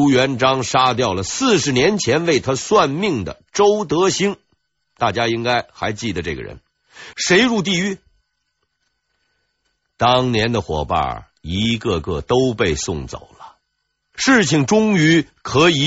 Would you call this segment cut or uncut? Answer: cut